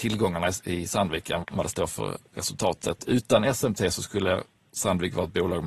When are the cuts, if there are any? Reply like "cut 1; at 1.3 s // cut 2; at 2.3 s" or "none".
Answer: cut 1; at 1.4 s // cut 2; at 3.0 s